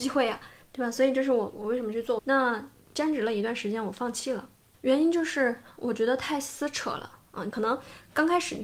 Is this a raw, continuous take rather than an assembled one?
no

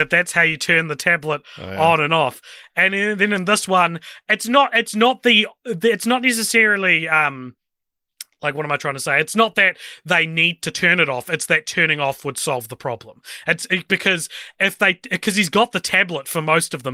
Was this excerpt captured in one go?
yes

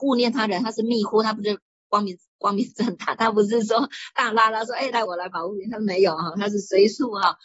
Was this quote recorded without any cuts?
no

